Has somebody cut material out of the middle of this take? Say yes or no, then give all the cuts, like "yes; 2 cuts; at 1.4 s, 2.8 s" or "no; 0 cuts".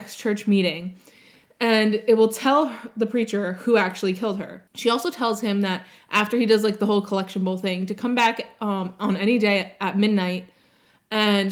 yes; 1 cut; at 4.7 s